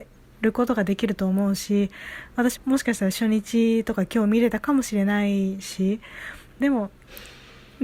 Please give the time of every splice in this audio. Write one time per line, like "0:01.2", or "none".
0:02.6
0:06.6